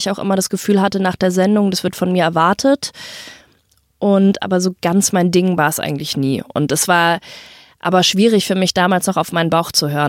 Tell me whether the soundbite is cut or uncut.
uncut